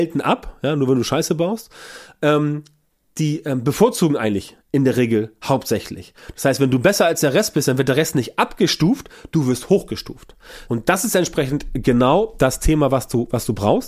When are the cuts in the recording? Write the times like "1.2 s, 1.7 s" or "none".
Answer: 10.7 s